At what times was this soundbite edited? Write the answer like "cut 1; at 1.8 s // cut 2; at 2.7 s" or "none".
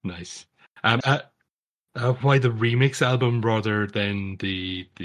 cut 1; at 1.0 s // cut 2; at 2.2 s

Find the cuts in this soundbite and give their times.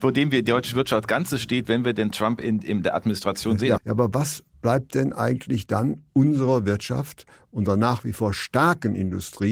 cut 1; at 3.8 s

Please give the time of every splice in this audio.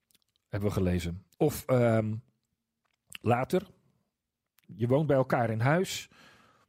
cut 1; at 1.3 s // cut 2; at 4.6 s

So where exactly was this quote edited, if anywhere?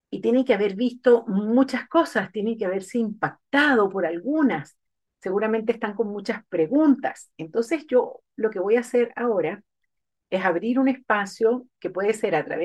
none

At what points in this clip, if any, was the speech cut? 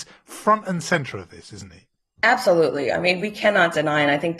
none

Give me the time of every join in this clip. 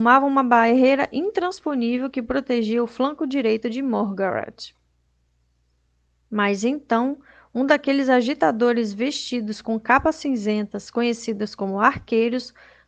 none

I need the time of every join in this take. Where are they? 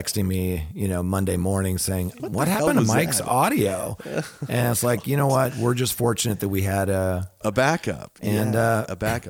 cut 1; at 2.2 s // cut 2; at 7.4 s

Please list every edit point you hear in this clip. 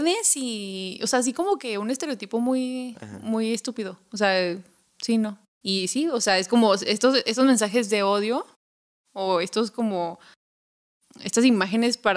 cut 1; at 5.6 s

